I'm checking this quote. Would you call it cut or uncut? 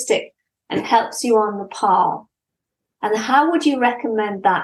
uncut